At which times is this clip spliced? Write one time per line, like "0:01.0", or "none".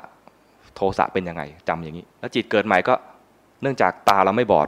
0:02.1